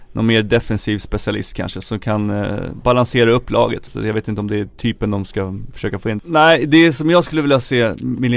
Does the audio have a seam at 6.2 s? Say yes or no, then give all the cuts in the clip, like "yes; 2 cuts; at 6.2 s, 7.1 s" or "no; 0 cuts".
yes; 2 cuts; at 3.9 s, 6.2 s